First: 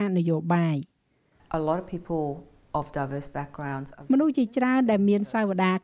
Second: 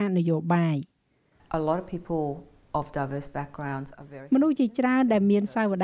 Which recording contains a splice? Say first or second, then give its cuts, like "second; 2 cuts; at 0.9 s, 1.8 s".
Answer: first; 1 cut; at 4.1 s